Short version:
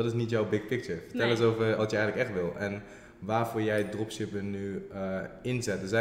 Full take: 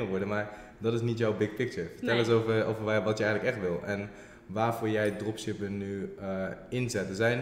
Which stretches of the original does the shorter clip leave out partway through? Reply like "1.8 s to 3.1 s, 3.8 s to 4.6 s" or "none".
2.6 s to 3.0 s